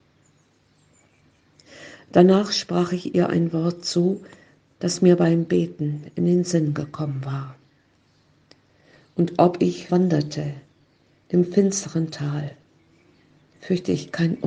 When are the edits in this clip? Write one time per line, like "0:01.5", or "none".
0:09.9